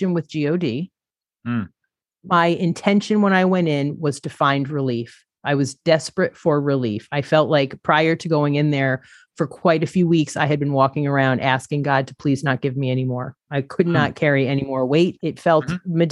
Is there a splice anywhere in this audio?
yes; 2 cuts; at 13.5 s, 15.2 s

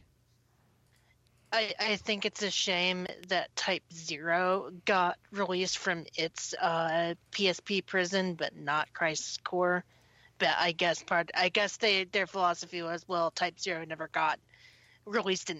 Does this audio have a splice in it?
yes; 1 cut; at 7.2 s

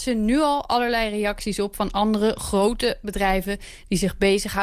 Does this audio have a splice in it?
no; 0 cuts

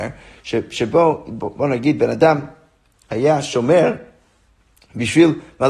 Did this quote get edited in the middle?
no; 0 cuts

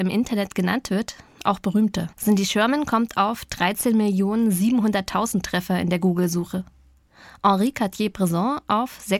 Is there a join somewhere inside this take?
yes; 1 cut; at 2.1 s

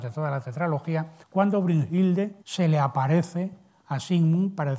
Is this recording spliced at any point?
yes; 2 cuts; at 1.2 s, 2.4 s

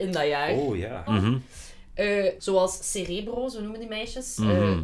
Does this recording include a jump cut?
yes; 2 cuts; at 1.1 s, 2.4 s

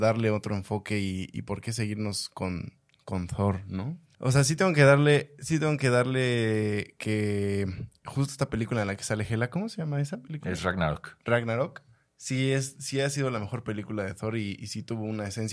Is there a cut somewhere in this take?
yes; 1 cut; at 4.1 s

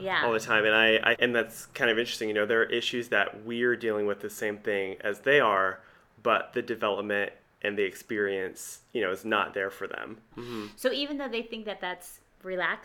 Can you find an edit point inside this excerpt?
yes; 2 cuts; at 1.1 s, 10.3 s

